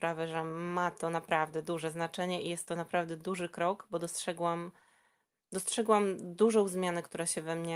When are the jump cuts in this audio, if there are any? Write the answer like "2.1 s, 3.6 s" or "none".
none